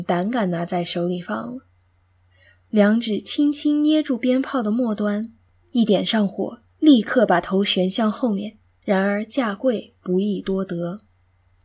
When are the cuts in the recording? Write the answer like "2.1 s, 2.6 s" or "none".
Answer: 8.8 s